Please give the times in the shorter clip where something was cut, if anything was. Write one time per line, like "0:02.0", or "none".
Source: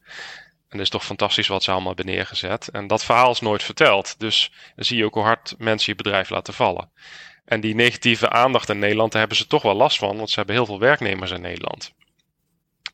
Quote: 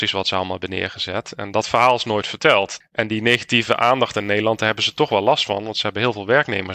0:02.8